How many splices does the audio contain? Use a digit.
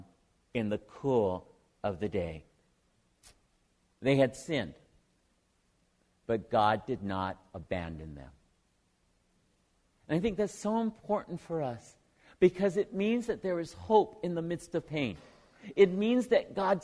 1